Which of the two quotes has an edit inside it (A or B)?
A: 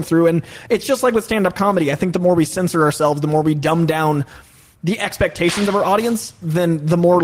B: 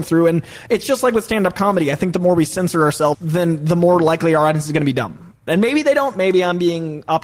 B